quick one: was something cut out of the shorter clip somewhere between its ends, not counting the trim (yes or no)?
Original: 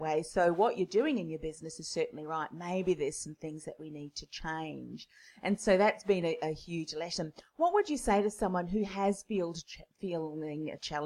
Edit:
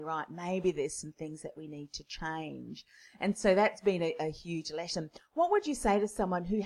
no